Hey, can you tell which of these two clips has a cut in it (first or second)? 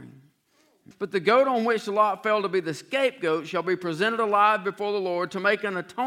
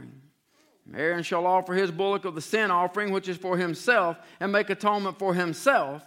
first